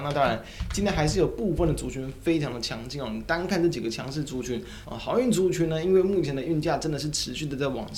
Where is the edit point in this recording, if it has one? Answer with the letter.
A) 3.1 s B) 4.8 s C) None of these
B